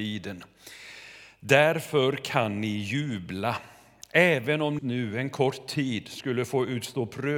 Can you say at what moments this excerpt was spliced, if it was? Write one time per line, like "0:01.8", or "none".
0:04.8